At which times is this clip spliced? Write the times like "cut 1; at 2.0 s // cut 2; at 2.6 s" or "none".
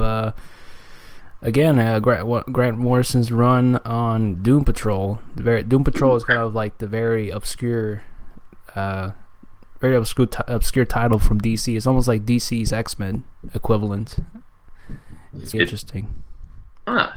cut 1; at 15.5 s